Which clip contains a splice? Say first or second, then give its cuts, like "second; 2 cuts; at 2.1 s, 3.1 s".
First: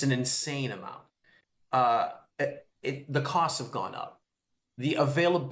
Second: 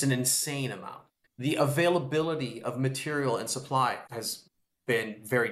second; 2 cuts; at 1.3 s, 4.1 s